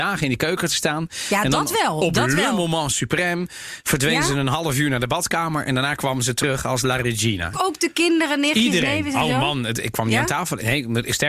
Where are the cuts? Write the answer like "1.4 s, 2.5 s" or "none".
7.5 s